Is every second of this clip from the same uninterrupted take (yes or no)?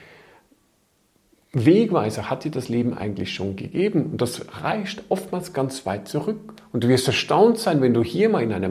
yes